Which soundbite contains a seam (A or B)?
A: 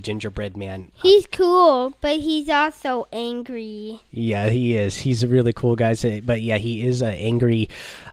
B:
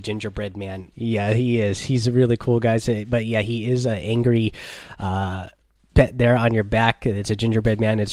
B